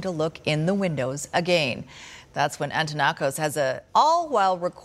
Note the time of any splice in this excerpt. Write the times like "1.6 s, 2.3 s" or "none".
3.9 s